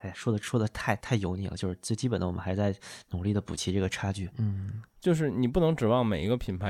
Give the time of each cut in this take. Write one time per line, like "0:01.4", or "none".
0:01.0
0:04.3